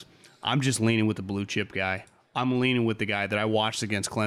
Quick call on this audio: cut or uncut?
uncut